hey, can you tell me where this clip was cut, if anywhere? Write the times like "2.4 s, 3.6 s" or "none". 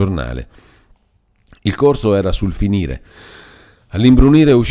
none